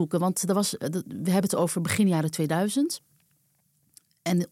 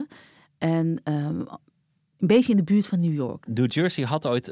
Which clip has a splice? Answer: second; 1 cut; at 3.5 s

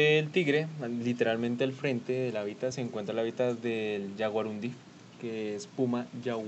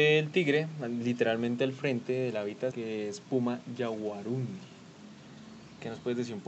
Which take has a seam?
second; 1 cut; at 2.7 s

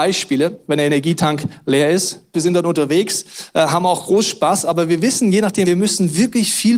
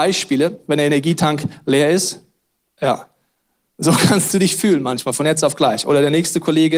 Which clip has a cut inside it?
first; 2 cuts; at 2.3 s, 5.6 s

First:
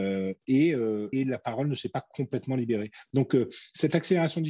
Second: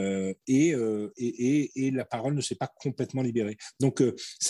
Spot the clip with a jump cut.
first; 1 cut; at 1.1 s

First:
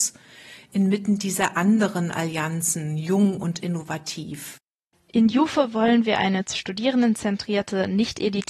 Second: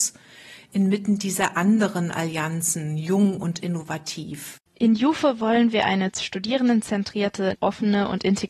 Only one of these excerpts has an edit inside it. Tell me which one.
second; 2 cuts; at 4.7 s, 7.5 s

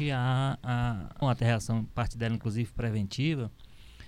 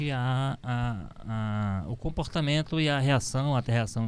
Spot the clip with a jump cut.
first; 1 cut; at 1.2 s

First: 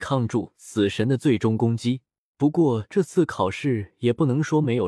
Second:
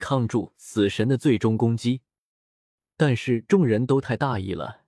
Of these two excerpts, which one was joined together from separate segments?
first; 1 cut; at 2.3 s

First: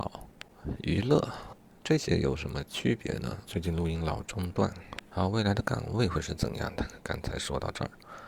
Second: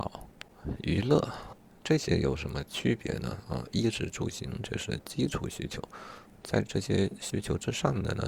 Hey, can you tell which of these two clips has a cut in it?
first; 1 cut; at 3.4 s

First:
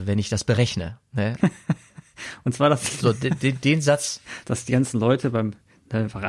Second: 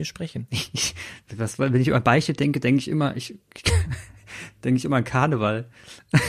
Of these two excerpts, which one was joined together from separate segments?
first; 2 cuts; at 1.4 s, 4.4 s

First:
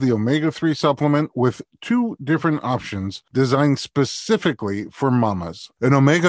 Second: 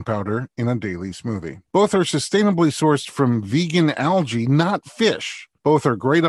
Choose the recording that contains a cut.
second; 1 cut; at 1.6 s

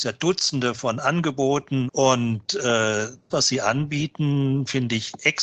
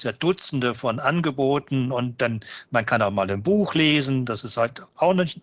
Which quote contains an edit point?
first; 2 cuts; at 1.9 s, 3.3 s

